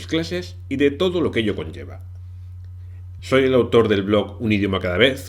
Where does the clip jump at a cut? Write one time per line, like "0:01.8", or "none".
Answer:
0:03.2